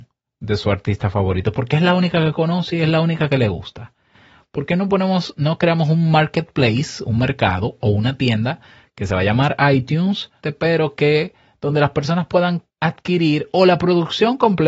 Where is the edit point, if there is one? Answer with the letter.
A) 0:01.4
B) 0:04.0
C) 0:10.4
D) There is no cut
C